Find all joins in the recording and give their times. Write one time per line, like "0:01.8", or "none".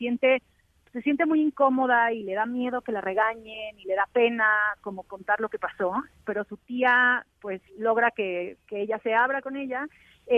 0:06.2
0:07.7